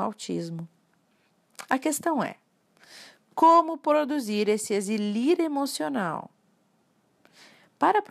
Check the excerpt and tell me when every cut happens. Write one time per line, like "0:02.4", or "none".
none